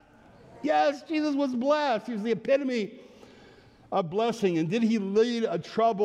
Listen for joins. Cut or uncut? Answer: uncut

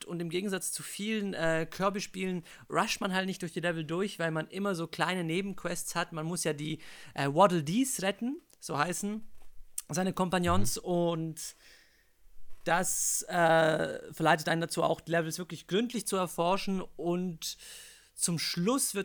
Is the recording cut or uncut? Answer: uncut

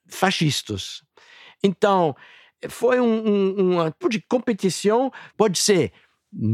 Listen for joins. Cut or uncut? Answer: cut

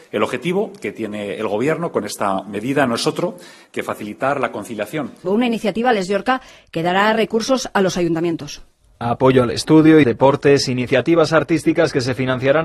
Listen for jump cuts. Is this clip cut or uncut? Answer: cut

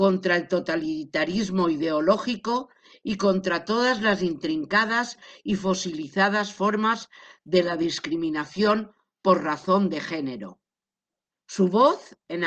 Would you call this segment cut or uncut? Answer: cut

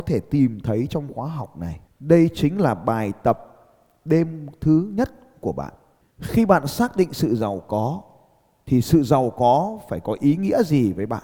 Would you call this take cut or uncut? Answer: cut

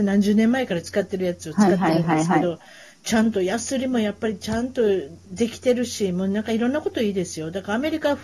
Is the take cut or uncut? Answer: uncut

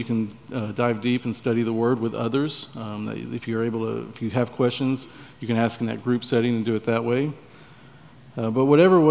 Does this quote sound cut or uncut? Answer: uncut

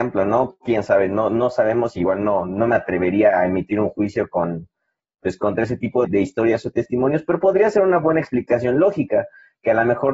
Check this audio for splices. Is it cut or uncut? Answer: cut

